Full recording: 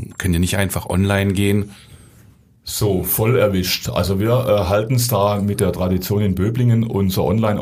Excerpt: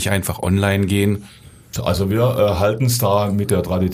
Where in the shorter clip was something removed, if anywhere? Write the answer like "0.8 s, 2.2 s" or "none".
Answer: 1.7 s